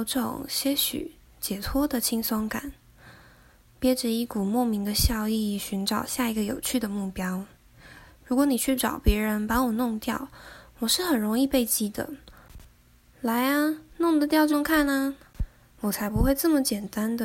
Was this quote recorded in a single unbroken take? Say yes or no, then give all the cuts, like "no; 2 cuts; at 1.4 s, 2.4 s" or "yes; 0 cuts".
no; 1 cut; at 14.5 s